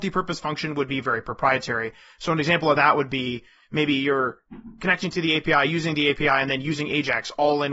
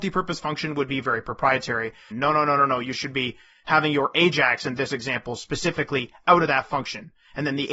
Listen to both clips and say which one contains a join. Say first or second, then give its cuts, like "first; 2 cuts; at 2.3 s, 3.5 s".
second; 1 cut; at 2.1 s